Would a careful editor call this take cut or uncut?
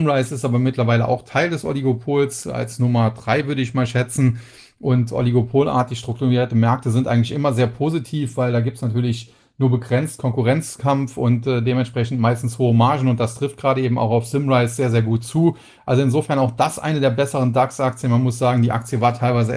uncut